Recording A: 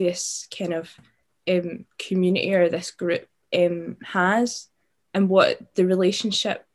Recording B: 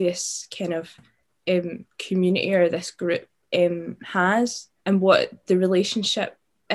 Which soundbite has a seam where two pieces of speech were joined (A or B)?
B